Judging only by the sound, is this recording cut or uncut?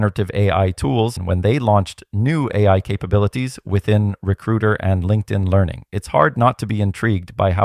cut